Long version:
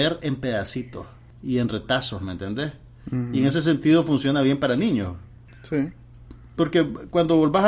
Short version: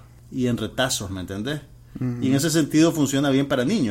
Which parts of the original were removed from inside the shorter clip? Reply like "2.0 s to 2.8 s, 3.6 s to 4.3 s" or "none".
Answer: none